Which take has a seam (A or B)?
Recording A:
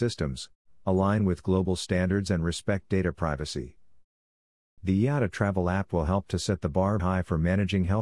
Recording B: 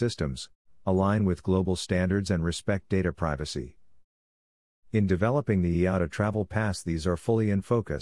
A